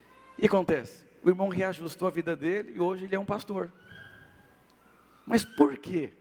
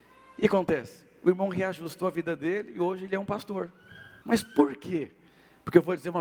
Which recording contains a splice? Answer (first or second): second